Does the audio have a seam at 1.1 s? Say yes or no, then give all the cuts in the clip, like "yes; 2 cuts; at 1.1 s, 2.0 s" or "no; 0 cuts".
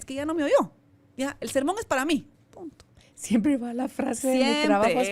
no; 1 cut; at 2.3 s